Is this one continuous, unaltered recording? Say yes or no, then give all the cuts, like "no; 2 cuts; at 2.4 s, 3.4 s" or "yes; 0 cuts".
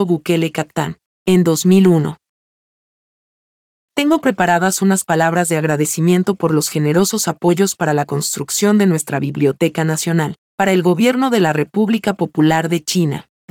no; 1 cut; at 3.8 s